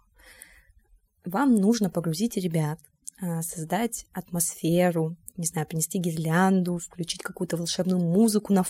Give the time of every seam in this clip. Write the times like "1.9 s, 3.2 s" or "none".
none